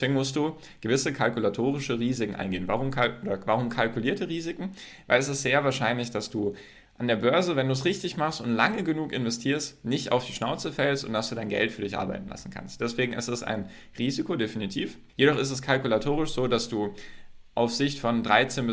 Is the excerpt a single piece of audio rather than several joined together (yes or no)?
no